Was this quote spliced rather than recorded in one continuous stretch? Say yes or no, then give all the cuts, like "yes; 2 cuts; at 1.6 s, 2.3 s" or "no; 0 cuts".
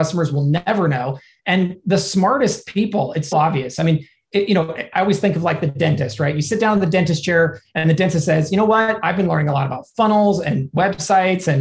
yes; 1 cut; at 3.3 s